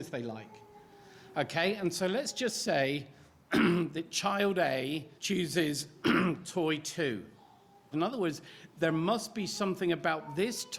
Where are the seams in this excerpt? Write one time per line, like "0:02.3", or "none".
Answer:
0:05.2
0:07.9